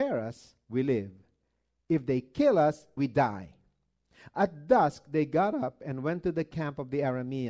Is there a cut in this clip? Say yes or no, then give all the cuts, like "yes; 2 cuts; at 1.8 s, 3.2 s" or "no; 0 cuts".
yes; 1 cut; at 3.0 s